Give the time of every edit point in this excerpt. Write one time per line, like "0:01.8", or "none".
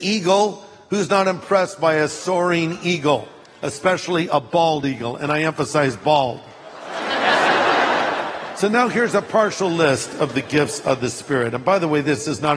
none